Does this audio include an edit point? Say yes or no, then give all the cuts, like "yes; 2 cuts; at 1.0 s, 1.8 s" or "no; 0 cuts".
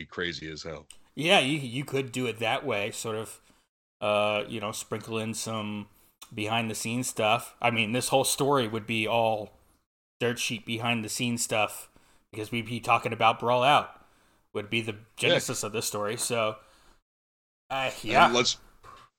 no; 0 cuts